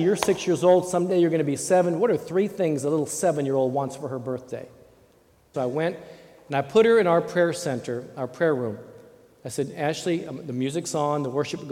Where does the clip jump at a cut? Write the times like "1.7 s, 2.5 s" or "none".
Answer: 5.5 s